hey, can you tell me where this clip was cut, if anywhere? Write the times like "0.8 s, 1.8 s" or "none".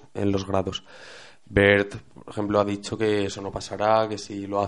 none